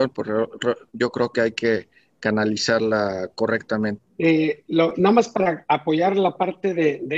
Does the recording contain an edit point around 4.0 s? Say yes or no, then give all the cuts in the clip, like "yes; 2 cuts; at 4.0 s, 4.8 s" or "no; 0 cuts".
yes; 1 cut; at 4.0 s